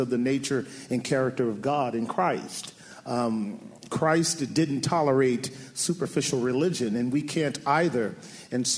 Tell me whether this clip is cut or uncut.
uncut